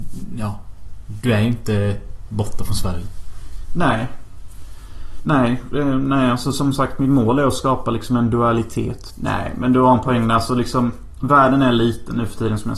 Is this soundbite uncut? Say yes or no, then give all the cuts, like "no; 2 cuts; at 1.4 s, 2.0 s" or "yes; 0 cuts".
no; 1 cut; at 9.1 s